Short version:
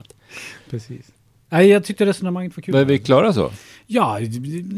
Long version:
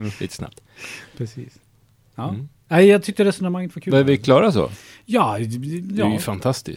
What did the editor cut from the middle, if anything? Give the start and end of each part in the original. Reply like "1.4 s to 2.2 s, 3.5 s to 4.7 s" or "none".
1.9 s to 2.6 s